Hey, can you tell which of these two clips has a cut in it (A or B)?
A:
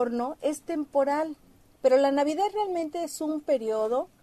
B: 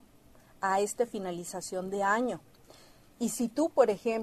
A